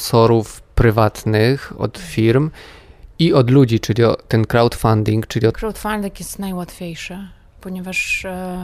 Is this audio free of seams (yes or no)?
no